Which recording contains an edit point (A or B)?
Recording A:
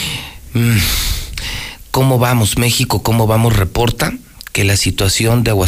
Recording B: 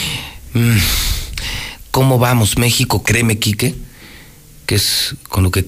B